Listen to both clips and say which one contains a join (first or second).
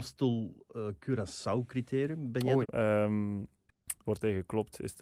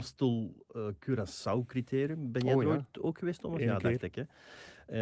first